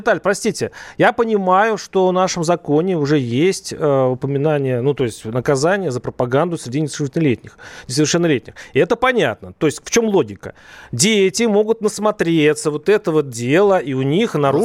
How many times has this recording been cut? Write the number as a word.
zero